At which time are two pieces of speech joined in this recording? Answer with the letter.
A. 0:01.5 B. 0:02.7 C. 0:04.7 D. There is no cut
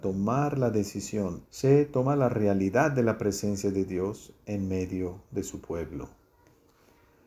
A